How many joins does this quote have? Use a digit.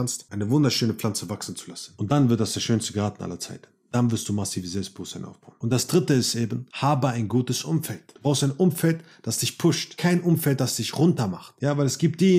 0